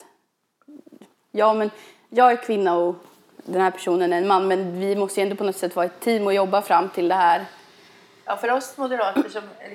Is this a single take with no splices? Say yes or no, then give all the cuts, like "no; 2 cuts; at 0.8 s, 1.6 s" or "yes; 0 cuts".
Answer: yes; 0 cuts